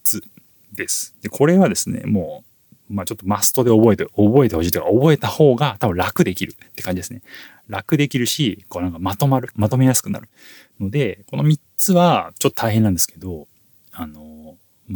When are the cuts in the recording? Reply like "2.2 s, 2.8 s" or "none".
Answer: 9.5 s